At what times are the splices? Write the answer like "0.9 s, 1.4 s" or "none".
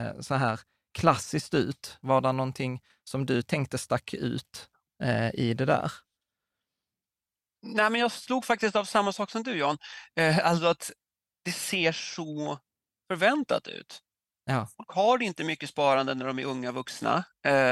2.0 s